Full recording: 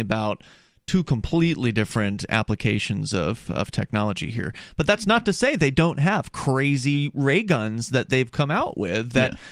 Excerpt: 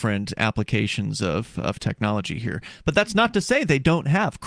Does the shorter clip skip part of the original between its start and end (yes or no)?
no